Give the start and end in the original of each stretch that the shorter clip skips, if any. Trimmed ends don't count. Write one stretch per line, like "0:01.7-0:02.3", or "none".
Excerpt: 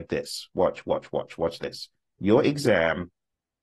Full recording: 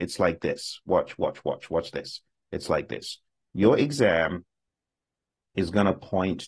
0:02.4-0:03.4

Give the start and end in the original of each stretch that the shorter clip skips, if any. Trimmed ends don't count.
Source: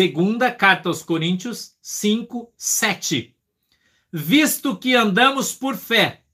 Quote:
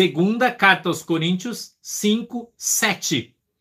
none

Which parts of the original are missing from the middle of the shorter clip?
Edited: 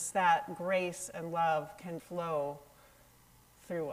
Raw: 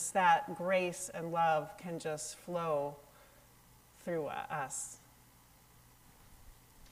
0:02.0-0:02.4

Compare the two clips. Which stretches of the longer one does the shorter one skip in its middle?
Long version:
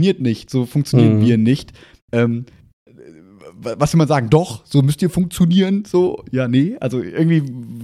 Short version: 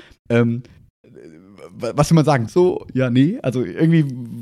0:04.3-0:05.8

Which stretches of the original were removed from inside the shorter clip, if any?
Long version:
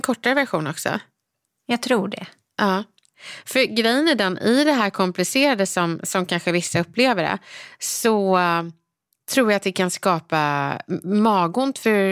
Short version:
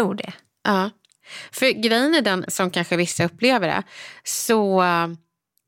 0:04.4-0:06.0

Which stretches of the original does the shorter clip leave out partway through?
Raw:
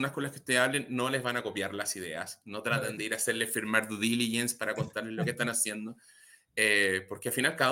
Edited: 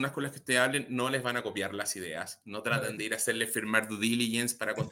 none

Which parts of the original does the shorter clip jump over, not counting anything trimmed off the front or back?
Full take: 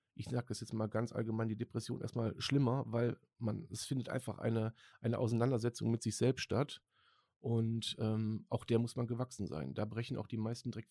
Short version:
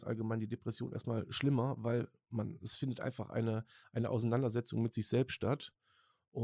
none

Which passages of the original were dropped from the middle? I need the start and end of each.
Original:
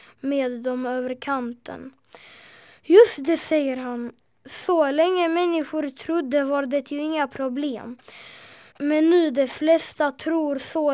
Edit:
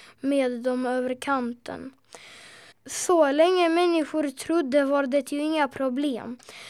0:02.7-0:04.3

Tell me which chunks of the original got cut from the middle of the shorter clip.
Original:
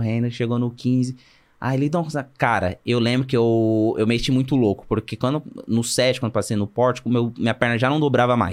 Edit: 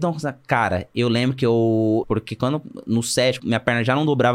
0:03.9-0:04.8
0:06.2-0:07.3

